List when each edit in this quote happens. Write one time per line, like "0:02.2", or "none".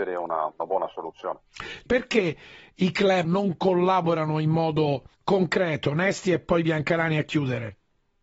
0:01.9
0:03.2
0:05.1